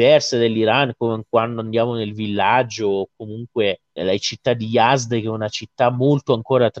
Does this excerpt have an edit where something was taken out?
yes; 1 cut; at 4.0 s

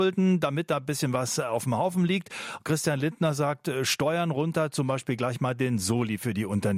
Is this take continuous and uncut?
yes; 0 cuts

